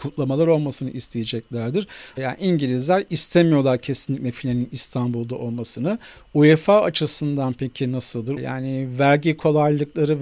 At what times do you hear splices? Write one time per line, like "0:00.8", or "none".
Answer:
0:02.1
0:08.4